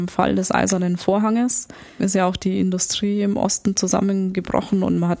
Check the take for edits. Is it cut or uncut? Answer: cut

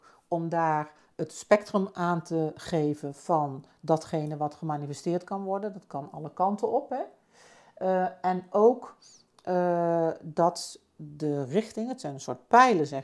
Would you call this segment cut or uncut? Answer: uncut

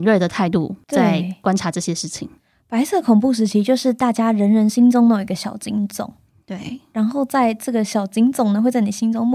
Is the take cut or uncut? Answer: uncut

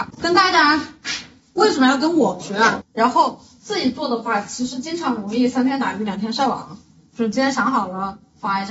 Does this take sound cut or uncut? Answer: cut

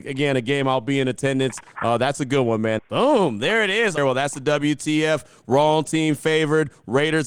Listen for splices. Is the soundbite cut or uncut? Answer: cut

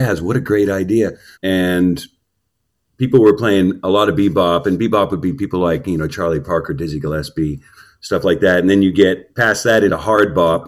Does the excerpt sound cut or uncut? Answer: cut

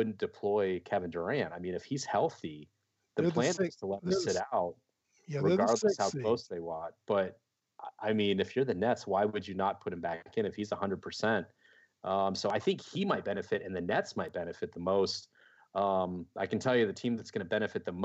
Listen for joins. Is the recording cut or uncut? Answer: uncut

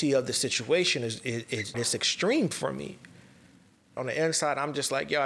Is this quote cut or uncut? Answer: cut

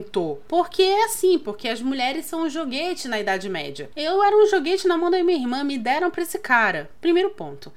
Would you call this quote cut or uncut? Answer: cut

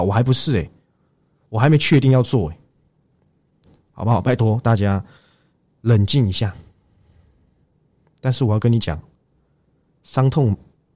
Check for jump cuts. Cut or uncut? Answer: uncut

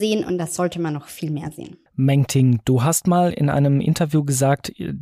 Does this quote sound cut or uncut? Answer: cut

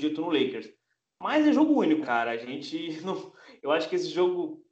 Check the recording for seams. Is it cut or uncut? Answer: cut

